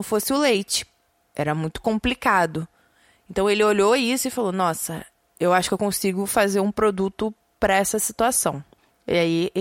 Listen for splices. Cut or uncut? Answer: uncut